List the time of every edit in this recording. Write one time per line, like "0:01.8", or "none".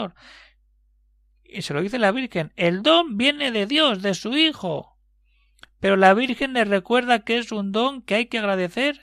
none